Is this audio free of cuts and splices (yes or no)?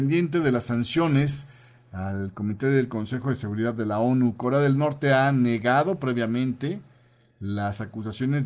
yes